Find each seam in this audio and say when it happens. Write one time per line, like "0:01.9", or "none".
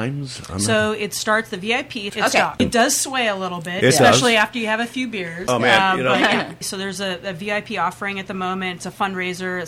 0:02.1
0:06.6